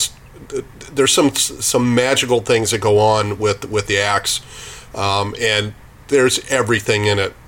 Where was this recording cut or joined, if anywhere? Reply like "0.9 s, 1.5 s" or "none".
none